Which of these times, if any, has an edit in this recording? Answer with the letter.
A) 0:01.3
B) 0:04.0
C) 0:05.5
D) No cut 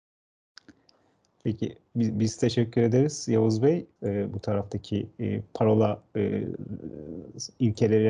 B